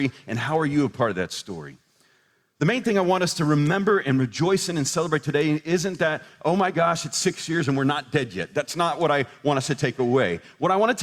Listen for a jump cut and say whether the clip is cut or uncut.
uncut